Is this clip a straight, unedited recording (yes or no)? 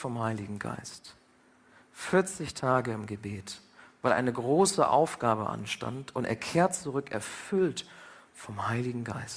yes